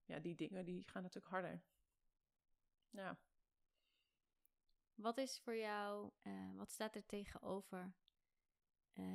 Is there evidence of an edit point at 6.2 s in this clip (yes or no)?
yes